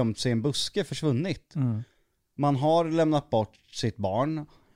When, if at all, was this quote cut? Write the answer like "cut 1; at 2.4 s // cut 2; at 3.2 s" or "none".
cut 1; at 2.4 s